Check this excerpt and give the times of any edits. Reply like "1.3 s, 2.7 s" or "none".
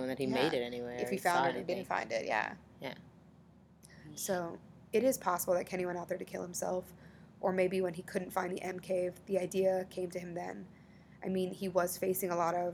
none